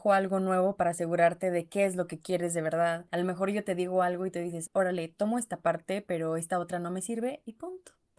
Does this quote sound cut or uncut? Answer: cut